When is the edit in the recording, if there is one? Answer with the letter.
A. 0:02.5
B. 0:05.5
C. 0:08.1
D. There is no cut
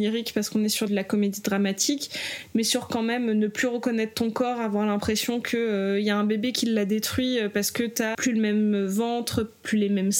C